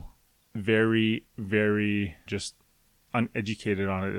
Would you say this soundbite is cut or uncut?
cut